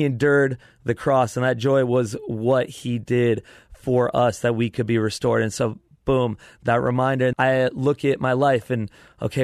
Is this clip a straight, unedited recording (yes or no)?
no